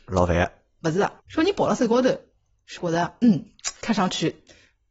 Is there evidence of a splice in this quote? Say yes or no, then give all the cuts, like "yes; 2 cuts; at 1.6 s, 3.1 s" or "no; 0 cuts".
yes; 2 cuts; at 1.2 s, 2.8 s